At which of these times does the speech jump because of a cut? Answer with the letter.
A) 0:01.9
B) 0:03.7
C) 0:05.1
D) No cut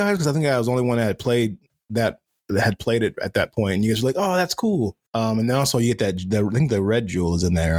C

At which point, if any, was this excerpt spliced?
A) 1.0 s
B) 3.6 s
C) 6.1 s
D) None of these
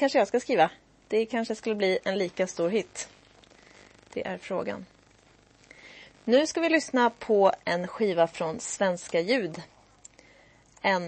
A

